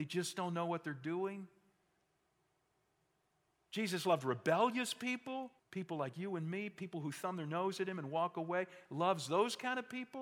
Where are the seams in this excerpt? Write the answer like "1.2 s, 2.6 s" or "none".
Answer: 5.6 s